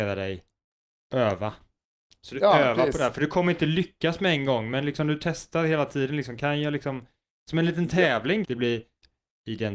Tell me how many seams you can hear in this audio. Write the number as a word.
one